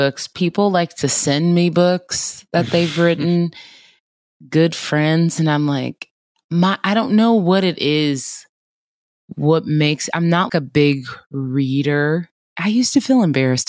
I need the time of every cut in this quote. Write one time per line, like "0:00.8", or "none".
0:10.5